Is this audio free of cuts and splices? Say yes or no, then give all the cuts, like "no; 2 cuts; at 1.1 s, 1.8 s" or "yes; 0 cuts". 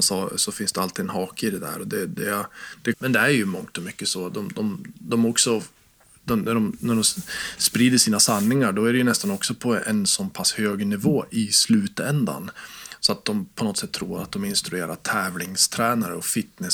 no; 1 cut; at 2.9 s